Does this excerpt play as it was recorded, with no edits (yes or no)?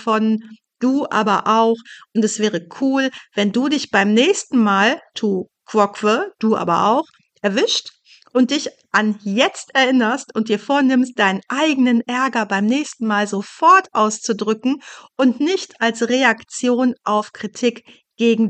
yes